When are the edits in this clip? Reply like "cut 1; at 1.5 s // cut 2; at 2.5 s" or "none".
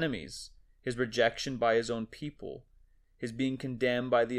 cut 1; at 3.0 s